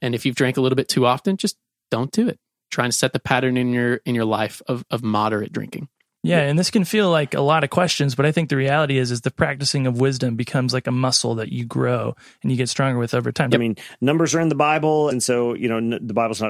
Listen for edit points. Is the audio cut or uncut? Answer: cut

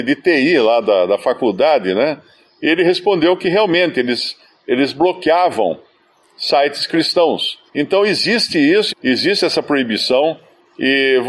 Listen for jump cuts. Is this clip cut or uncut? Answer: cut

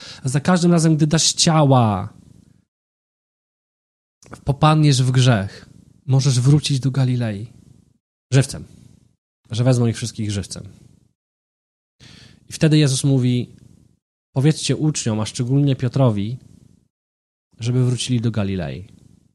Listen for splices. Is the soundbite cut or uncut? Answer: cut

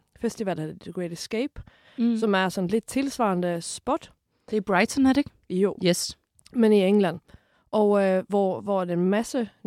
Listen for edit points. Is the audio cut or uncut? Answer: uncut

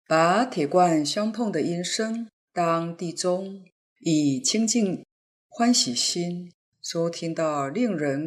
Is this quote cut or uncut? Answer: cut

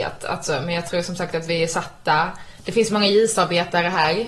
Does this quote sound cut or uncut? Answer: uncut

